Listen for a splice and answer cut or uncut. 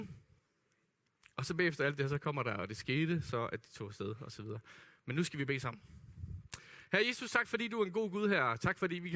uncut